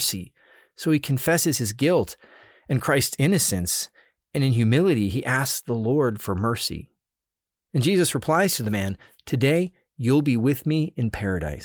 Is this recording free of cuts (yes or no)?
yes